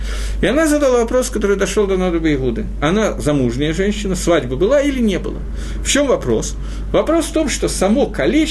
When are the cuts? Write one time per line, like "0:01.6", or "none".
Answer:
none